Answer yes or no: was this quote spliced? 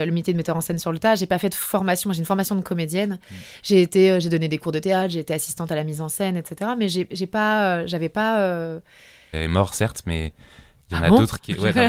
yes